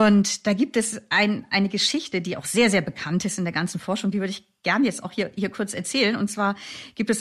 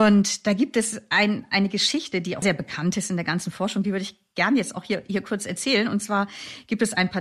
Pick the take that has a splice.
second; 1 cut; at 2.4 s

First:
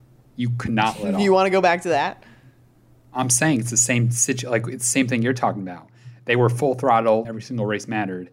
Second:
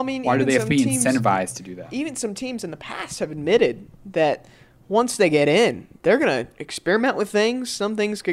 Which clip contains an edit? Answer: first; 1 cut; at 7.2 s

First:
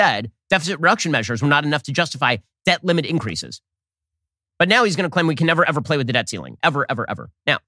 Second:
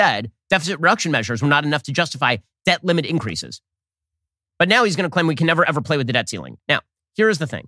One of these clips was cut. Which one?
second; 1 cut; at 6.6 s

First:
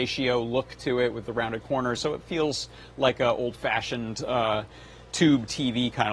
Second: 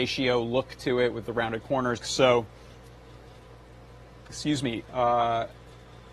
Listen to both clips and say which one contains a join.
second; 2 cuts; at 2.0 s, 4.8 s

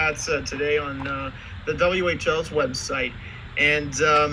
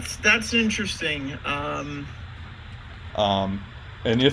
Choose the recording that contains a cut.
second; 1 cut; at 3.1 s

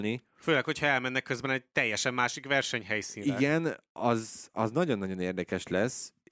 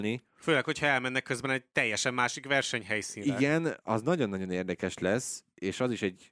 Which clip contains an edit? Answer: second; 1 cut; at 3.8 s

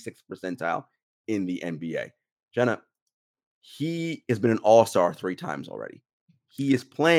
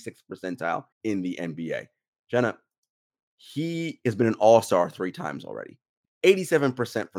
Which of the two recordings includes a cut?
second; 2 cuts; at 0.9 s, 6.0 s

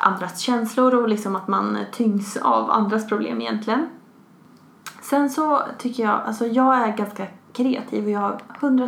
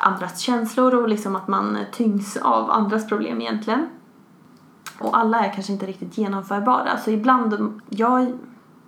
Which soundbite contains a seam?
second; 2 cuts; at 5.0 s, 7.8 s

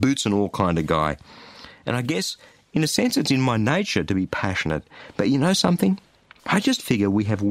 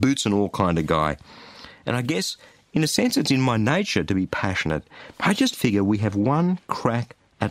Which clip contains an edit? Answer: second; 1 cut; at 5.1 s

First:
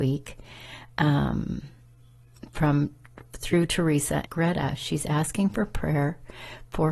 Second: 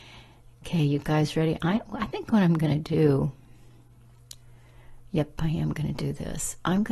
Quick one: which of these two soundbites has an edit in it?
first; 1 cut; at 4.3 s

